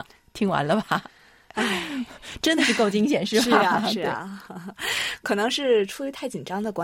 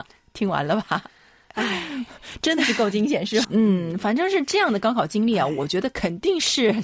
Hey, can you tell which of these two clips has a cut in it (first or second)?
second